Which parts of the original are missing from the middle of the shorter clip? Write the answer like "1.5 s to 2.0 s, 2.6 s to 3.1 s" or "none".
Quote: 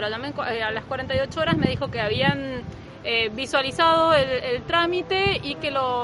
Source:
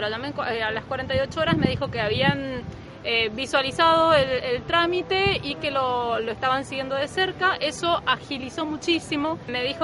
none

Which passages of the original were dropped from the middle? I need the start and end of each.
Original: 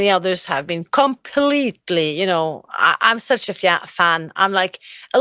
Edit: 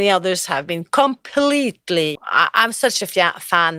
2.2 s to 2.6 s

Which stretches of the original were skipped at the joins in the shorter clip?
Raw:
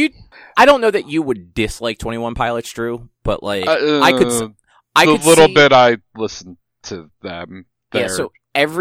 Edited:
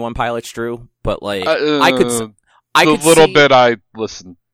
none

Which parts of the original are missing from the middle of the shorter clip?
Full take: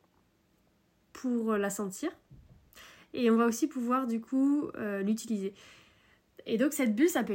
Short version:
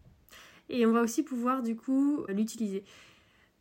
4.7 s to 5.0 s

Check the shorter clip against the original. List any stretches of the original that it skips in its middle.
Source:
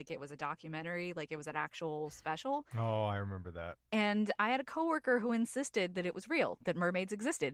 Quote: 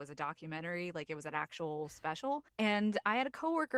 2.7 s to 3.8 s

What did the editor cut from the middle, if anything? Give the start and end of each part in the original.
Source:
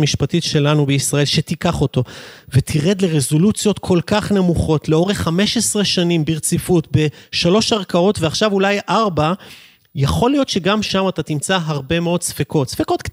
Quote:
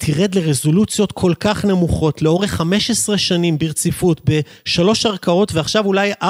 none

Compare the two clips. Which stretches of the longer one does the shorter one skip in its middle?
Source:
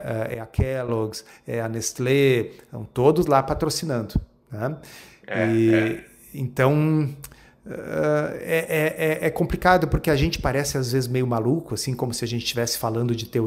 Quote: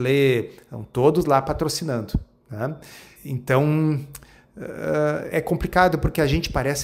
5.2 s to 6.2 s, 8.4 s to 9.2 s

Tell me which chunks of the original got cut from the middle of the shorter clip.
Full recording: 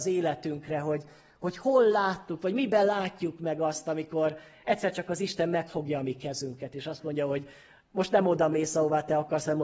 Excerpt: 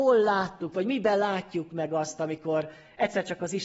none

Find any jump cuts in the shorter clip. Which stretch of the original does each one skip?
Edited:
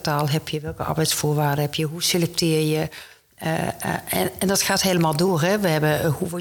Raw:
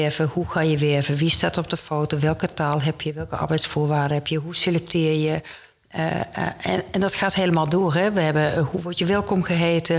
none

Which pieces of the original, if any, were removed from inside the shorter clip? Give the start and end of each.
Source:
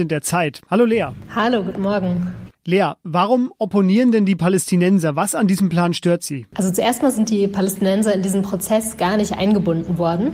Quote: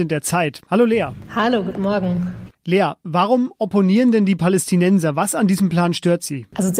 none

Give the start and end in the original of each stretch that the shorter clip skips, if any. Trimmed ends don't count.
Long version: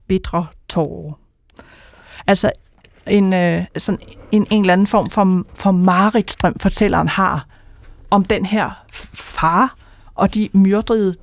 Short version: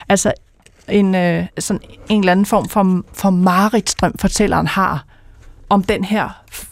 4.2 s to 4.5 s

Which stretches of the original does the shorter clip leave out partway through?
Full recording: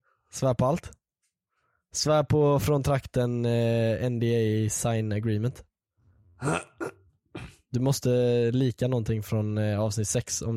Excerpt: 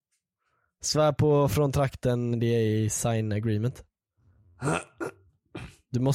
3.4 s to 4.1 s

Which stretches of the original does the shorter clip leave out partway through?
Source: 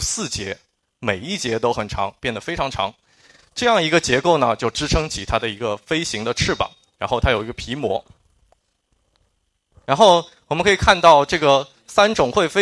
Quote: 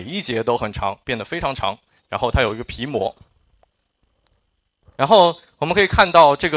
3.1 s to 6.9 s

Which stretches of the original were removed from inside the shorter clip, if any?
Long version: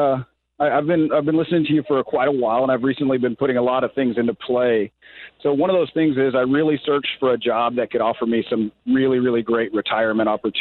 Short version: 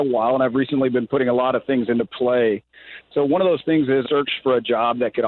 6.3 s to 6.8 s

